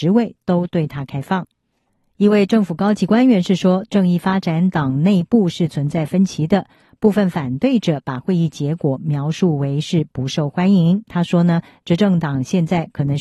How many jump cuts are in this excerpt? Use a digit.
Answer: 1